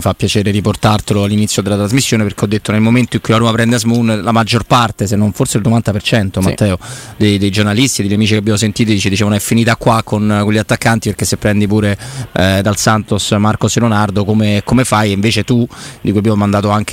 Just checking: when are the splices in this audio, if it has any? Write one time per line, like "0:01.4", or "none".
0:12.6